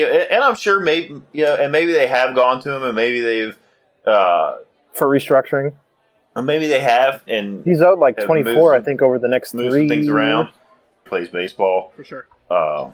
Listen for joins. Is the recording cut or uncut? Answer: cut